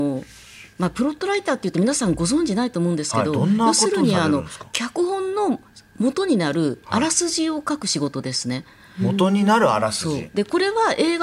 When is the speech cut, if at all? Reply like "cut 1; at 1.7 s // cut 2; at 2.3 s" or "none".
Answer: none